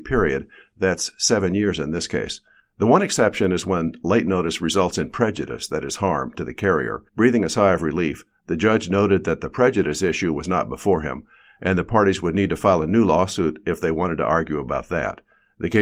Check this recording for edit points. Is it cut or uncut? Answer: cut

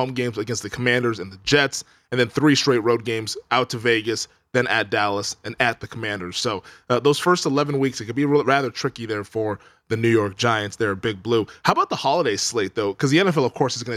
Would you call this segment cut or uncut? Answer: uncut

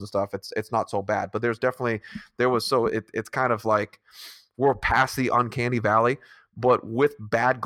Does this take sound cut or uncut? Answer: uncut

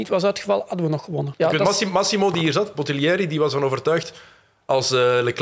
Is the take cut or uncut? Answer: cut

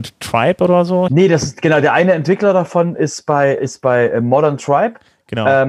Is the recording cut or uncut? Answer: cut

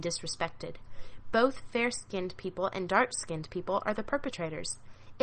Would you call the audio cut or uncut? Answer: uncut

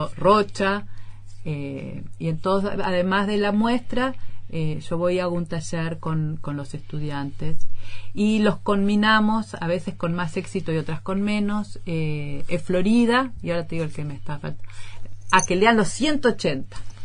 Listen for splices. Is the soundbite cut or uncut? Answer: uncut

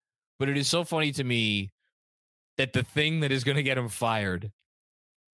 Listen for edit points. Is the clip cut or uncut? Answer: uncut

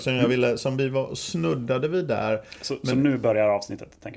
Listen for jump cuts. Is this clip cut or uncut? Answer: uncut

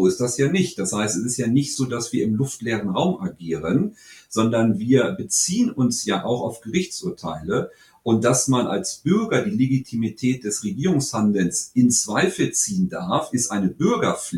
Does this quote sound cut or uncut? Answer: uncut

